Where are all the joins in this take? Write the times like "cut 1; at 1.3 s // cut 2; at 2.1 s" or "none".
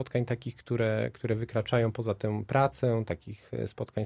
none